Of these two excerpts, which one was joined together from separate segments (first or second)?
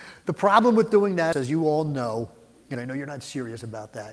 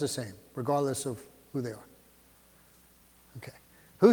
first